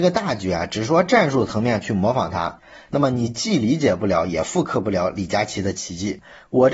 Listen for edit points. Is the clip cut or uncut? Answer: uncut